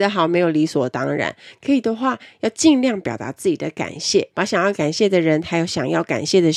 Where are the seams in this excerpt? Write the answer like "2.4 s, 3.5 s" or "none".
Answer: 4.3 s